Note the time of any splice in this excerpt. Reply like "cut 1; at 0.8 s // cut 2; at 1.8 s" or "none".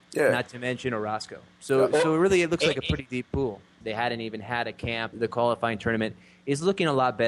cut 1; at 3.8 s // cut 2; at 5.1 s

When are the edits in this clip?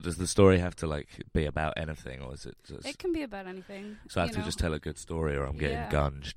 none

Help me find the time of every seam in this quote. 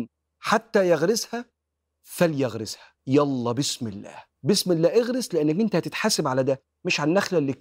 cut 1; at 3.0 s // cut 2; at 4.4 s

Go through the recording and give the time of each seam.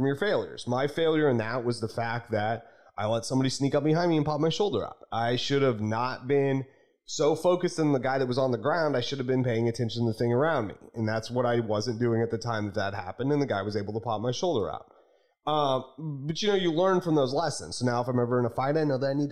none

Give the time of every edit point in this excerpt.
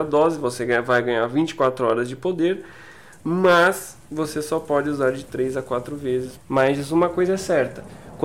cut 1; at 6.4 s

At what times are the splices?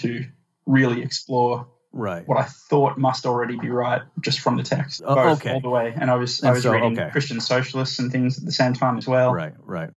cut 1; at 5.0 s

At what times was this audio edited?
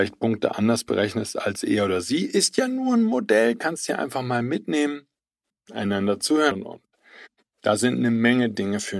cut 1; at 5.5 s // cut 2; at 6.5 s

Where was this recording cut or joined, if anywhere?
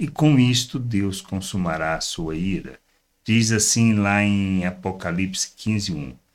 none

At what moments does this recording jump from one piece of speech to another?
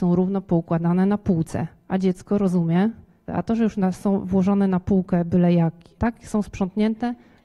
cut 1; at 3.3 s // cut 2; at 6.0 s

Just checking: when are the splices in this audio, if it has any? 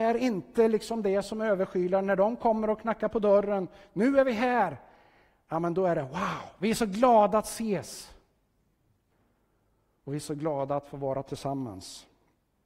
none

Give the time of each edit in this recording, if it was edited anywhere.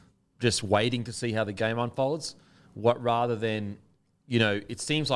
none

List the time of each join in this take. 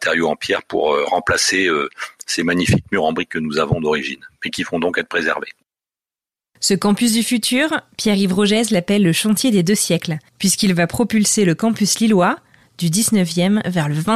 none

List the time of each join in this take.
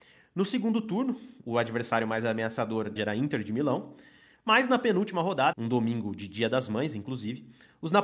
cut 1; at 3.0 s // cut 2; at 5.5 s

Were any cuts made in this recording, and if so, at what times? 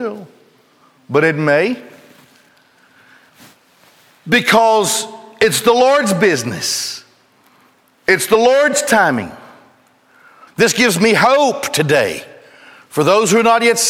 cut 1; at 10.5 s

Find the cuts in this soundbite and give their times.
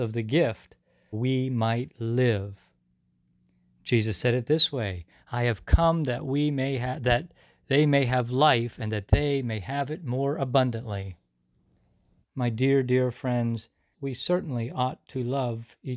cut 1; at 1.1 s // cut 2; at 12.2 s // cut 3; at 13.9 s

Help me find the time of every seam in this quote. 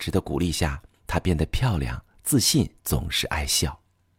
cut 1; at 2.8 s

